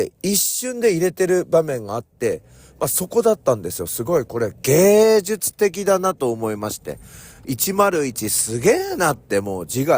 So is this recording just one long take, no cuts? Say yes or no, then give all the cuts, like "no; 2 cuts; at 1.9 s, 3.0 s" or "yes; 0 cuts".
yes; 0 cuts